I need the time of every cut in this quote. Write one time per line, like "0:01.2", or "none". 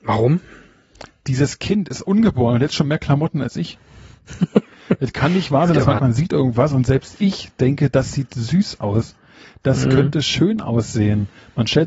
0:06.0